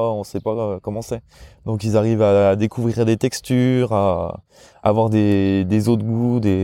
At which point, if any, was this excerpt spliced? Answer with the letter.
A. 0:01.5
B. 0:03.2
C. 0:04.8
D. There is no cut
D